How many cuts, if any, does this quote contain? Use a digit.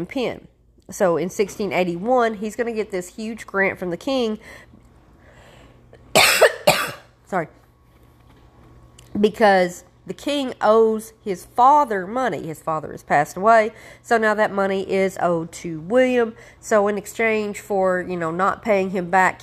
0